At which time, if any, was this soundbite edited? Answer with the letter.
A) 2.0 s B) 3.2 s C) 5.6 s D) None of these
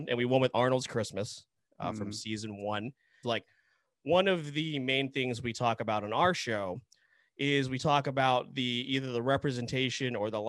B